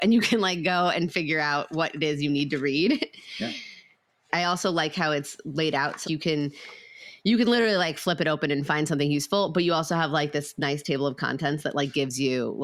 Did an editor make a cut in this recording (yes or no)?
yes